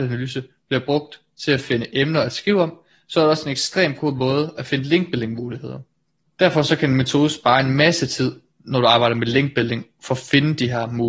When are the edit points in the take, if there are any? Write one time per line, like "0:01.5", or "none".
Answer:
0:06.3